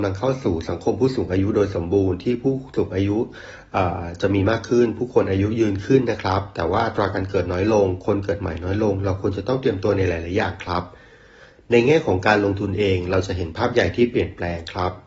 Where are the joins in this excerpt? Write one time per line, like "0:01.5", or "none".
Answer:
none